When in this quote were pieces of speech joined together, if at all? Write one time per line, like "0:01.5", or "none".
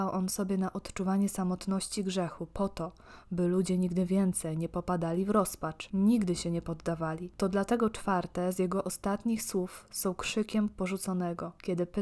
none